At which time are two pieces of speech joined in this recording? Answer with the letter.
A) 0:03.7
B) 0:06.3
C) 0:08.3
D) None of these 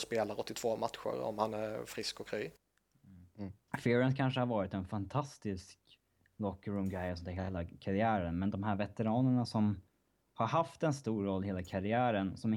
A